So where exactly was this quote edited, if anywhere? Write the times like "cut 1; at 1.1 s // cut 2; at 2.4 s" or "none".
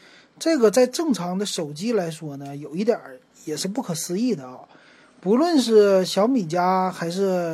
none